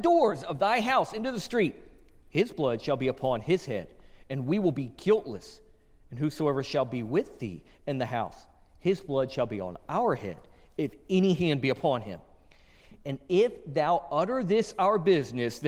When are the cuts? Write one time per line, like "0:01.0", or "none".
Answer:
none